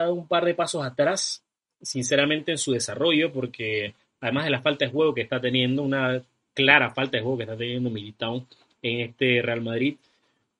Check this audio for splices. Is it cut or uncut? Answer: uncut